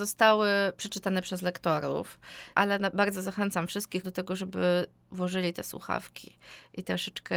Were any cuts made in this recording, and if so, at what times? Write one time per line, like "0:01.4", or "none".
0:02.5
0:04.0